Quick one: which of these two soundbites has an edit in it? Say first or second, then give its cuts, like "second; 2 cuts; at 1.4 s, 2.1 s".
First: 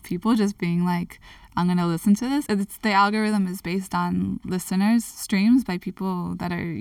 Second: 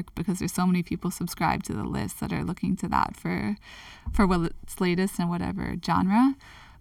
first; 1 cut; at 2.5 s